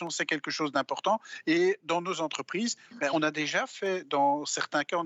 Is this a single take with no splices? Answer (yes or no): yes